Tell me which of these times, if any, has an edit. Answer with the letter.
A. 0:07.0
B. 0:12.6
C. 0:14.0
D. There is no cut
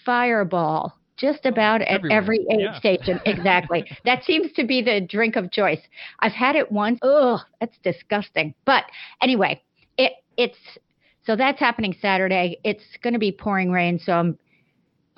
A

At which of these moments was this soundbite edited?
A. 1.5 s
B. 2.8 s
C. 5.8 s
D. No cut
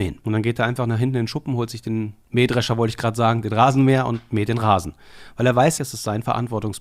C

